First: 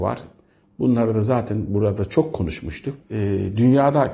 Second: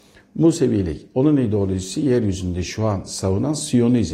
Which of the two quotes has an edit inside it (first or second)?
first